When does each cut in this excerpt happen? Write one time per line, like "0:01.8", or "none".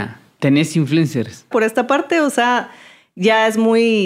0:01.5